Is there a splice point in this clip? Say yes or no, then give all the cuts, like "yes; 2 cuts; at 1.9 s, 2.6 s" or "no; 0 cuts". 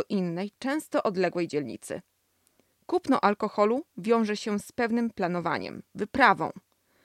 no; 0 cuts